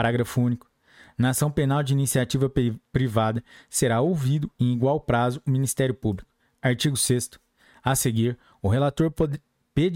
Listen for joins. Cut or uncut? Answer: uncut